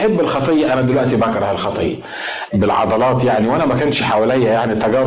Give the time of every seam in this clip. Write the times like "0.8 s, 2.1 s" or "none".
2.5 s